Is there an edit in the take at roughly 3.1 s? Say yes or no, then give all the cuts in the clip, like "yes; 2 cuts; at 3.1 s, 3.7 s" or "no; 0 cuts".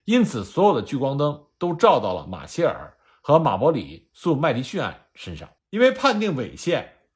no; 1 cut; at 5.6 s